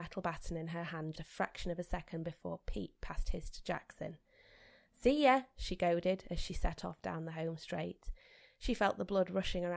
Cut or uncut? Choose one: cut